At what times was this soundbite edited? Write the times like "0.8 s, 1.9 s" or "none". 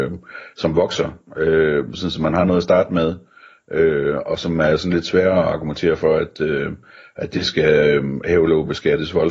none